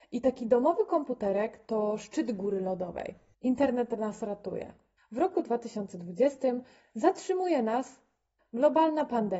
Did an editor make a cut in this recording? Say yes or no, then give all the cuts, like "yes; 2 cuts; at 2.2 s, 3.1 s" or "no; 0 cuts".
yes; 3 cuts; at 3.3 s, 5.0 s, 8.4 s